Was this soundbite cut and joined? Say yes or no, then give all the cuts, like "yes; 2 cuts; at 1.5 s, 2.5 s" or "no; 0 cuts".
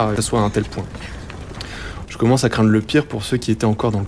yes; 1 cut; at 2.1 s